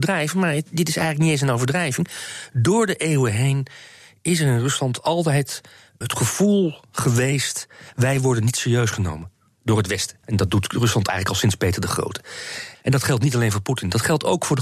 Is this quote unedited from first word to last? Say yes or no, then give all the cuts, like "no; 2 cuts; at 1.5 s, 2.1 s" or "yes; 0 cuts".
no; 3 cuts; at 6.0 s, 10.2 s, 12.7 s